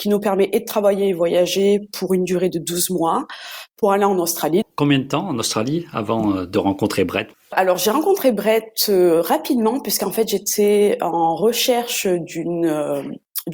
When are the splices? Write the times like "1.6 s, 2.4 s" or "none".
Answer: 4.6 s